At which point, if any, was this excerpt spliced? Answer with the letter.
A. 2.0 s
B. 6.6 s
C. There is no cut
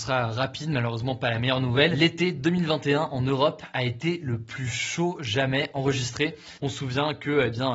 B